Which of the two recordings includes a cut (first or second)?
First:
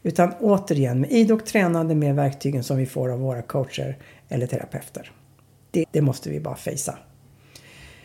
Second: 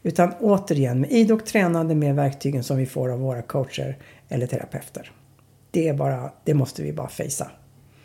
first